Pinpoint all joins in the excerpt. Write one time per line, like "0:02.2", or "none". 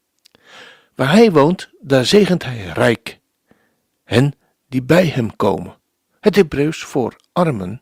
none